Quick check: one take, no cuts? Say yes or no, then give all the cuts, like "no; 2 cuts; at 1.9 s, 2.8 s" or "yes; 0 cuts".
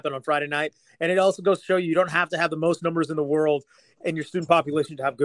yes; 0 cuts